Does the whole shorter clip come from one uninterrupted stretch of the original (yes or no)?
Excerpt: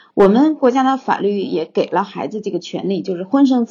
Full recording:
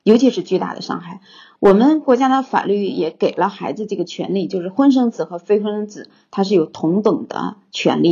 yes